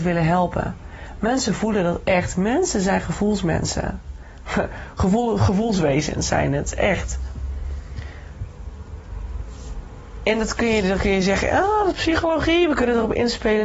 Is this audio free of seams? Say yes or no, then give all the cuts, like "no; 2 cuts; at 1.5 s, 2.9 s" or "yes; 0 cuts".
yes; 0 cuts